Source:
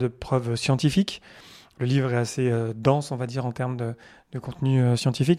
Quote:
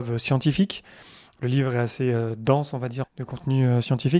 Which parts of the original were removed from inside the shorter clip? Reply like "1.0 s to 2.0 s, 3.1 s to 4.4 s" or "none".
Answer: 3.4 s to 4.2 s